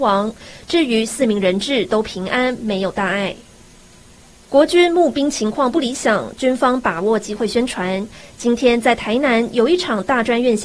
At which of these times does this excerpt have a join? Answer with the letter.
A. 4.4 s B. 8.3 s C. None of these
C